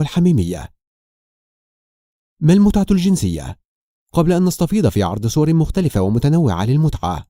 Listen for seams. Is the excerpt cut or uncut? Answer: uncut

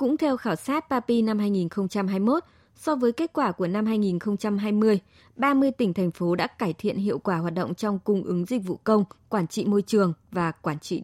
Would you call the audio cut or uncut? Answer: uncut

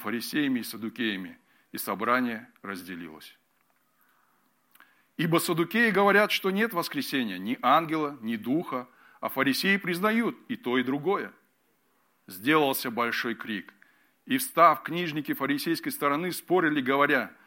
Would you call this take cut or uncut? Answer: uncut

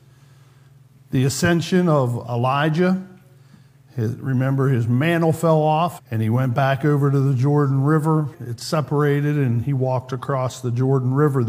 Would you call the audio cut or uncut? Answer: cut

